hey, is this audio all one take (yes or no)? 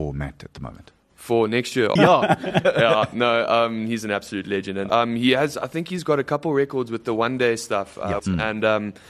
no